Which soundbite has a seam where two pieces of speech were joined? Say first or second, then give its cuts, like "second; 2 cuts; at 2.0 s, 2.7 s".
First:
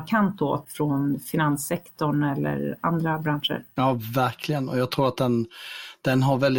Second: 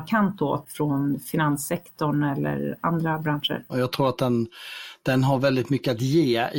second; 1 cut; at 3.7 s